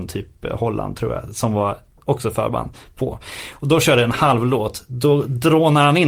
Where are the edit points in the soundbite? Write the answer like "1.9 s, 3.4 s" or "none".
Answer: none